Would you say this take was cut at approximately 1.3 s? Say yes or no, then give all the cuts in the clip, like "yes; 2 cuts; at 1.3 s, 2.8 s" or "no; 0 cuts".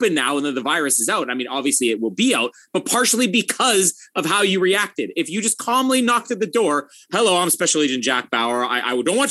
no; 1 cut; at 7.0 s